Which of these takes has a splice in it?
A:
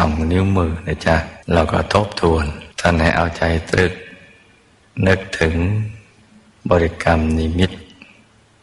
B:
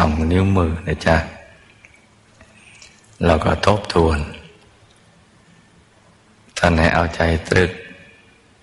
A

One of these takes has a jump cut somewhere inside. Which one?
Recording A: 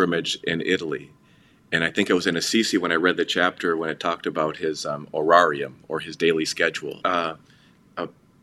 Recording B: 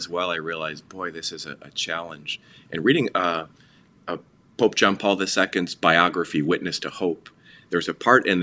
A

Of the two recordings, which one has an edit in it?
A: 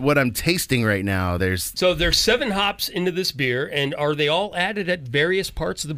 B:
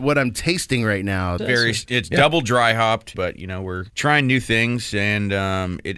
B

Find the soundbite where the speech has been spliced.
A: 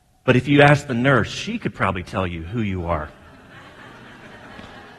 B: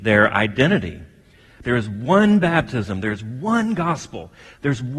B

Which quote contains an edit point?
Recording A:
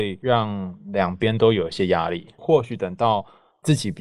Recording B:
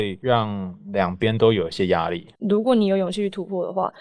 B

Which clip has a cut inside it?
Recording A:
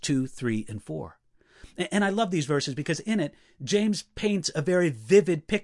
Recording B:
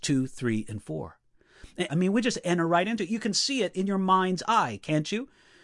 B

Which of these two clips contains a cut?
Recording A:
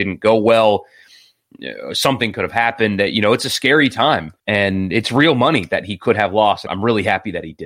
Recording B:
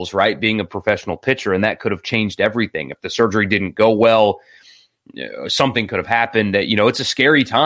A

